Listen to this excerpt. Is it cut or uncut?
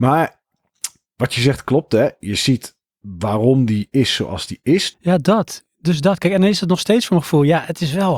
cut